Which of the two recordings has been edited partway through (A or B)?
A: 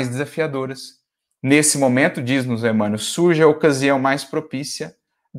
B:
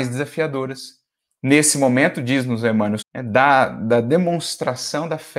B